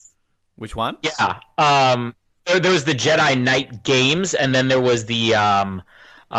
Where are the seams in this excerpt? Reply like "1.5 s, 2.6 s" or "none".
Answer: none